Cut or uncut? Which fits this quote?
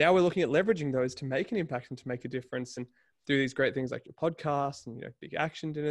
uncut